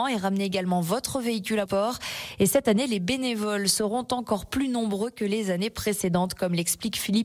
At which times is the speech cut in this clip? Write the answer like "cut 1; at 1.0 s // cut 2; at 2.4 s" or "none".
cut 1; at 1.7 s